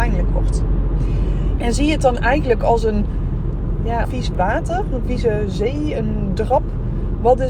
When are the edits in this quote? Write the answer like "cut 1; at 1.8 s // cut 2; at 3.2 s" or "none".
cut 1; at 1.6 s // cut 2; at 4.0 s